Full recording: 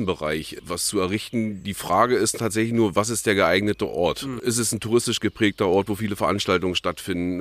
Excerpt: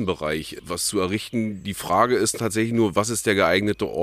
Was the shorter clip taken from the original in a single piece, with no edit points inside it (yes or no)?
yes